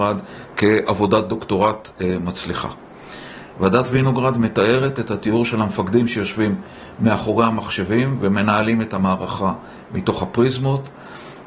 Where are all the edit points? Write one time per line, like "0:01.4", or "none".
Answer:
0:03.5